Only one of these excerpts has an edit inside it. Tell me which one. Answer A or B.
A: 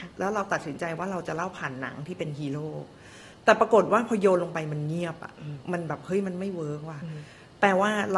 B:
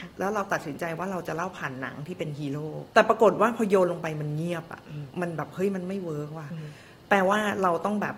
B